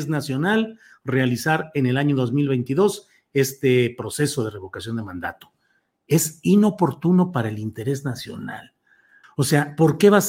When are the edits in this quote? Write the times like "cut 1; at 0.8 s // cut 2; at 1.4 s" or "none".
cut 1; at 9.2 s

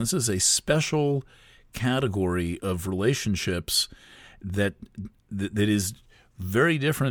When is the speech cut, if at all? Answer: none

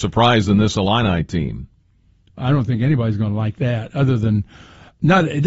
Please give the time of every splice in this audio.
cut 1; at 2.4 s

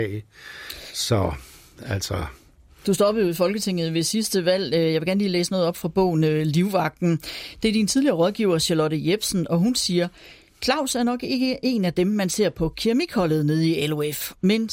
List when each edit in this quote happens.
none

